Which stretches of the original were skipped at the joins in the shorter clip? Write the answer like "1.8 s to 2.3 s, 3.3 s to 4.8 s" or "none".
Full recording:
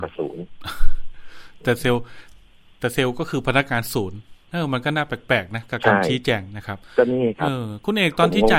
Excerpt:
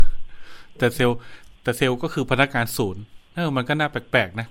2.4 s to 2.7 s